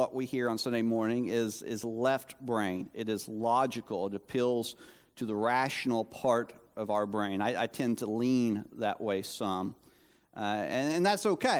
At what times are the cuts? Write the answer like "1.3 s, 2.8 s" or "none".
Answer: none